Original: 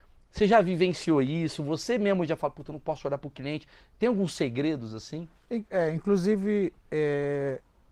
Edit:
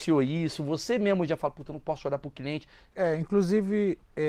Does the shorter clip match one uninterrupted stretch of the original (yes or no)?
no